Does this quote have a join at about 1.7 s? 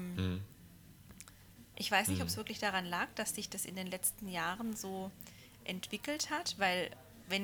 yes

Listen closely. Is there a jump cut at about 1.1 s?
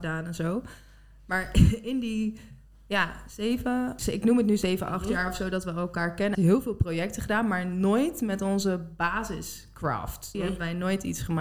no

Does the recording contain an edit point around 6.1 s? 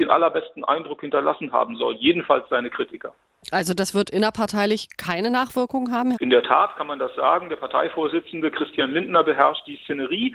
yes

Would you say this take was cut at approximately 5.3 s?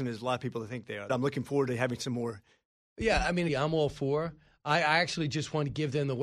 no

